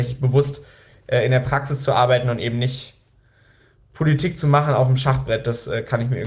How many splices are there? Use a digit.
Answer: 0